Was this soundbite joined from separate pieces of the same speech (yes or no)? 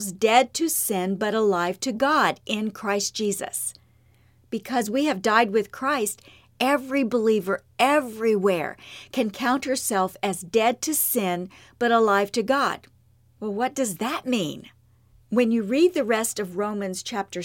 no